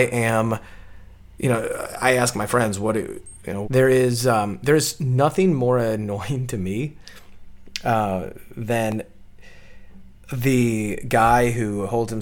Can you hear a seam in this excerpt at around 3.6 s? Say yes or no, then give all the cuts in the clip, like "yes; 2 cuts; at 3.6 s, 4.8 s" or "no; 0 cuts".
yes; 1 cut; at 3.6 s